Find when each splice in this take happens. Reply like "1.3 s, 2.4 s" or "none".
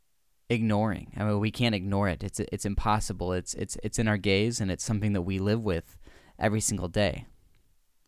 none